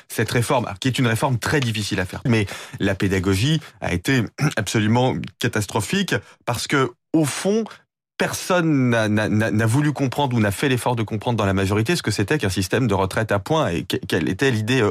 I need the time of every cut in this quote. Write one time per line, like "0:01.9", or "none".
0:02.3